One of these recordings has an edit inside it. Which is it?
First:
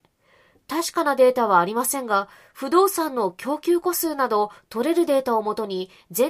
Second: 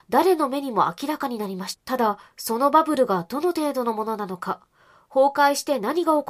second; 1 cut; at 1.7 s

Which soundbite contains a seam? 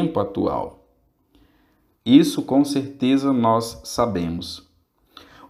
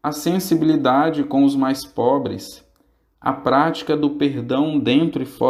first; 1 cut; at 1.9 s

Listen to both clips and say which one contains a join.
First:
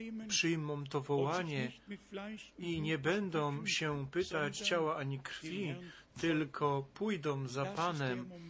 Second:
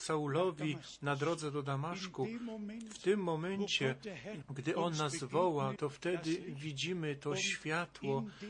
second; 2 cuts; at 4.4 s, 5.8 s

